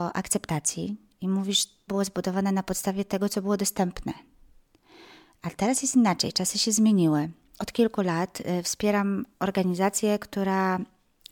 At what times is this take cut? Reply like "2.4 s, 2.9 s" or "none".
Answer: 1.9 s, 7.6 s